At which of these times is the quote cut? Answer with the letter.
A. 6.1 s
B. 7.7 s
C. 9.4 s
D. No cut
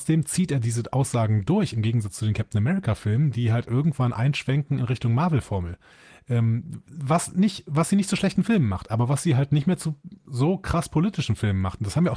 D